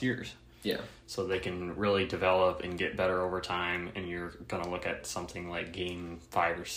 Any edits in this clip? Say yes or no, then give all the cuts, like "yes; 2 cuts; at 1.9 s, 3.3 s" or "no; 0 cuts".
no; 0 cuts